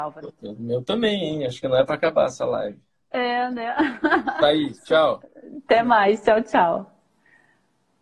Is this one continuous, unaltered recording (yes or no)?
yes